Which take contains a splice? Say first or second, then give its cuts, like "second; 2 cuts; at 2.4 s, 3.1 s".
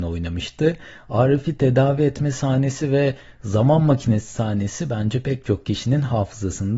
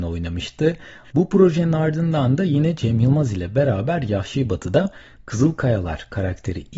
second; 1 cut; at 1.0 s